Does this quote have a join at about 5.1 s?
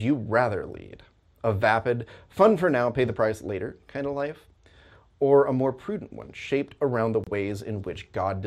no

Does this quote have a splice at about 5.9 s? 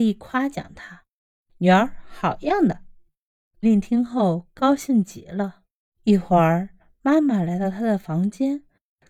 yes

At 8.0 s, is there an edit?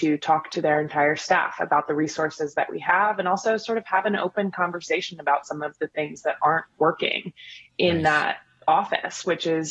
no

